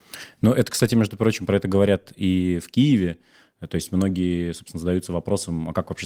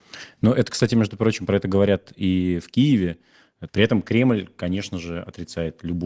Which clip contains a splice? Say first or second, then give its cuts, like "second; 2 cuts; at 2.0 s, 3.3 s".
second; 1 cut; at 3.7 s